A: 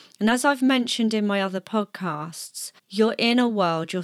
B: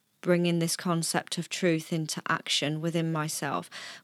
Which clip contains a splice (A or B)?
A